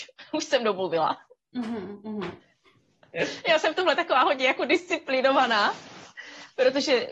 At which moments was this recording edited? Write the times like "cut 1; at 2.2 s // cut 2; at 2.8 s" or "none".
cut 1; at 2.4 s